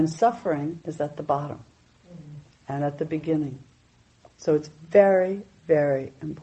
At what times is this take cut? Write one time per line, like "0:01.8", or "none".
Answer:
none